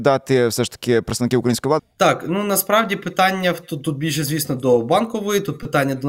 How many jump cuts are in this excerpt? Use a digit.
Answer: 1